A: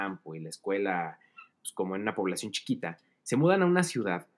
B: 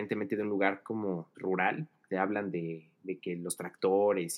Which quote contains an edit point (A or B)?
B